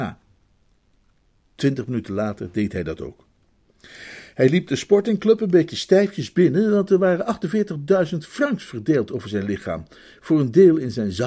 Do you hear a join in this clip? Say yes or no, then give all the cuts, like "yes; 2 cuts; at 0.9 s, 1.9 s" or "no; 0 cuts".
no; 0 cuts